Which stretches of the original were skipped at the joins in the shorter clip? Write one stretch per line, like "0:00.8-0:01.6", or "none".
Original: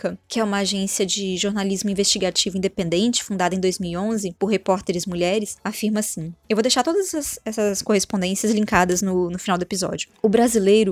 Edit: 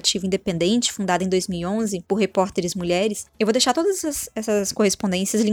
0:05.6-0:06.4